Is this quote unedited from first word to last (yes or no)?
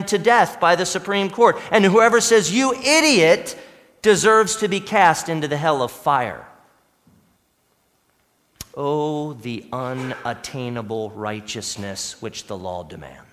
yes